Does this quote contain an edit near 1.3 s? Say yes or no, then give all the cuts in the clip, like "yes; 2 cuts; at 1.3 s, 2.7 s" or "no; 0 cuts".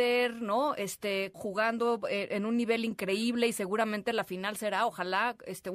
yes; 1 cut; at 1.3 s